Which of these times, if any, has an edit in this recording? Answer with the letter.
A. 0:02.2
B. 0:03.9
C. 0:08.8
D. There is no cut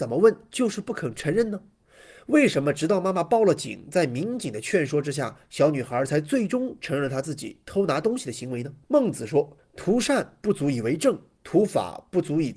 C